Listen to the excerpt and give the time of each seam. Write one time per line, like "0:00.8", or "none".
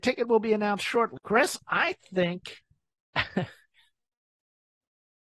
0:01.2